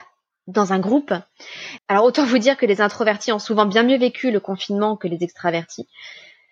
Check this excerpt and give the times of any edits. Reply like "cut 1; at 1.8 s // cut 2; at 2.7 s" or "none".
cut 1; at 1.8 s